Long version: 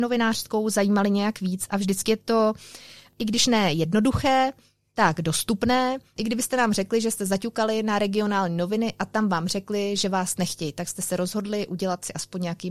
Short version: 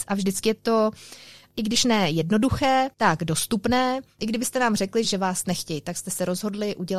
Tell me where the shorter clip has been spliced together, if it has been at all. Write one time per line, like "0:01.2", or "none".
0:02.9
0:05.0